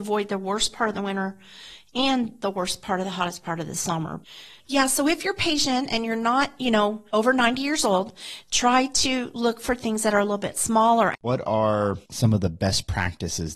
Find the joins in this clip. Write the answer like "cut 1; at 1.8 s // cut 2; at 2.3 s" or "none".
cut 1; at 7.1 s // cut 2; at 11.1 s

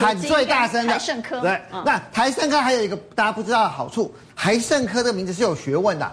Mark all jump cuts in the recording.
none

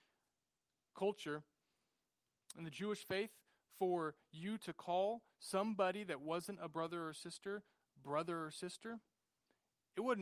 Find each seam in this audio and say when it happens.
none

